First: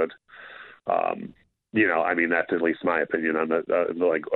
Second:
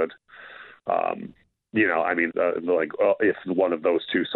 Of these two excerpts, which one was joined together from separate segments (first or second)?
second